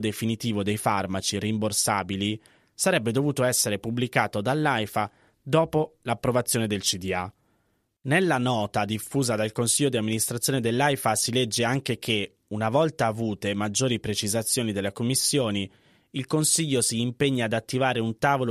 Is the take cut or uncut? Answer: uncut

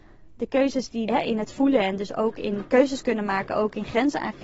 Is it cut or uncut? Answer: cut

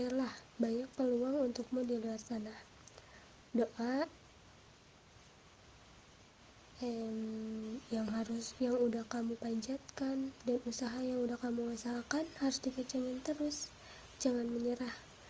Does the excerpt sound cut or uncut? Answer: uncut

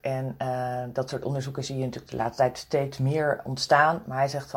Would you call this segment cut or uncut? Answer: uncut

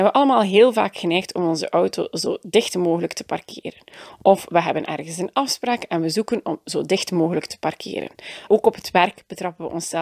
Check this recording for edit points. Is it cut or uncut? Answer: cut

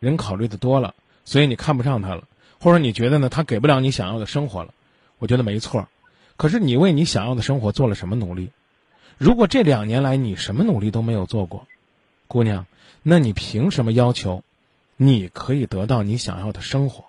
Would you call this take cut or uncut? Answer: uncut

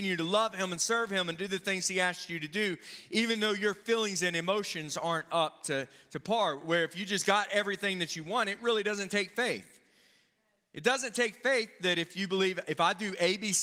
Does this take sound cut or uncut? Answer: uncut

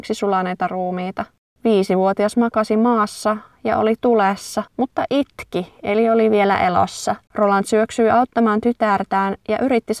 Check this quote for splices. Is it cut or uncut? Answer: cut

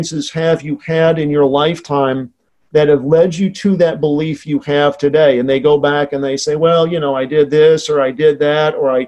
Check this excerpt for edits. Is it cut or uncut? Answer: uncut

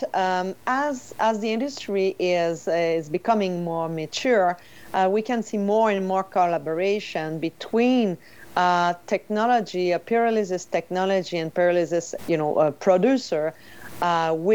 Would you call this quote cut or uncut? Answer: cut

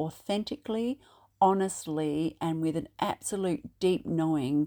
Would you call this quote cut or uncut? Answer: uncut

